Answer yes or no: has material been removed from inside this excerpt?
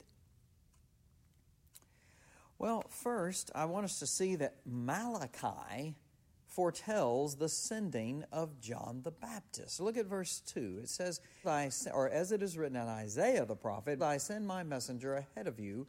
yes